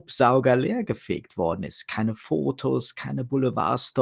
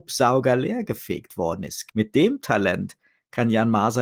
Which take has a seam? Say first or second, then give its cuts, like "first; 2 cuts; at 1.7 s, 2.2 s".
second; 1 cut; at 1.9 s